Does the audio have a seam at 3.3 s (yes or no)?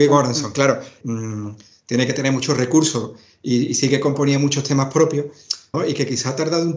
no